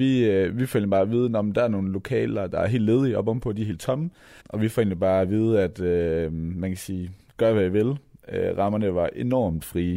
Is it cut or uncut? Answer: cut